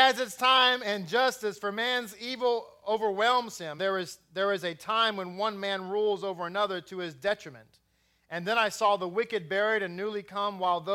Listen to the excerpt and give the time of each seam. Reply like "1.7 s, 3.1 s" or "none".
3.8 s